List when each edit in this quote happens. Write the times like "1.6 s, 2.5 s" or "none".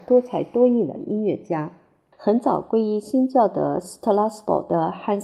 2.1 s

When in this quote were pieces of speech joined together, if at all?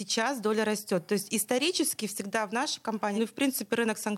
3.2 s

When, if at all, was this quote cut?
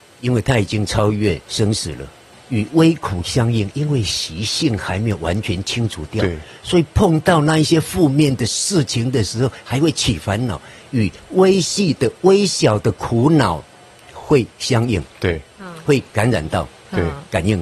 2.3 s

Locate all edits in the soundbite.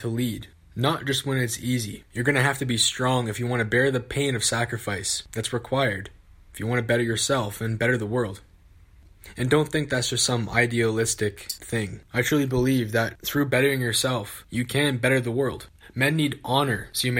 none

